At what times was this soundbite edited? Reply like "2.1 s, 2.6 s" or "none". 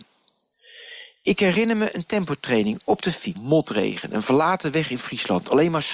3.3 s